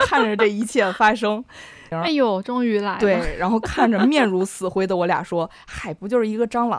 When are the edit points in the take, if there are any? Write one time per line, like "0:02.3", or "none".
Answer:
0:01.9